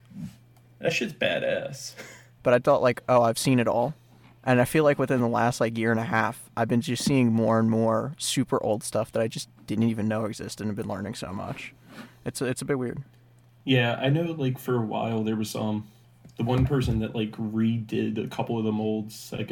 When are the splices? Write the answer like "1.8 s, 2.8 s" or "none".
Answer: 2.4 s

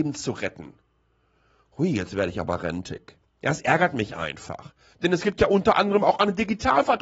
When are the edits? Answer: 4.9 s

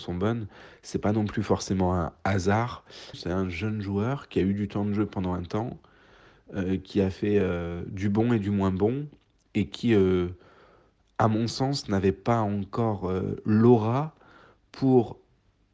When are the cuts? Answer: 3.1 s

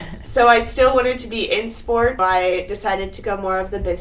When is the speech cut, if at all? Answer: 2.2 s

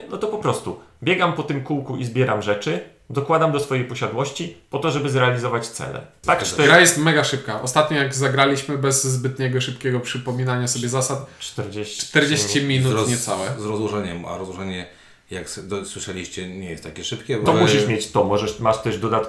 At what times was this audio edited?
6.2 s, 17.5 s

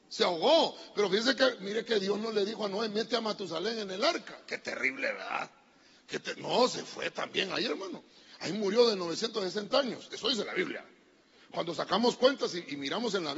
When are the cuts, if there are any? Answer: none

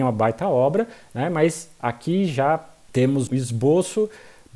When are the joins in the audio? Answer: 3.3 s

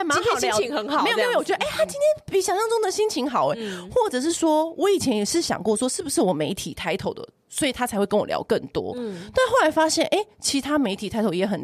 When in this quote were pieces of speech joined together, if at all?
none

